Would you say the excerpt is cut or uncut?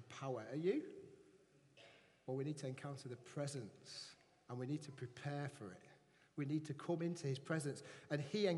uncut